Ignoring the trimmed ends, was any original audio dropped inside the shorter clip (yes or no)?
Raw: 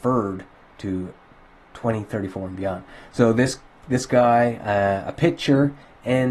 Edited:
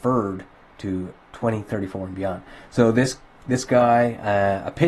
yes